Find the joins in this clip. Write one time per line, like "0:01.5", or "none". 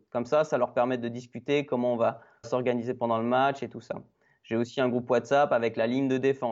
0:02.4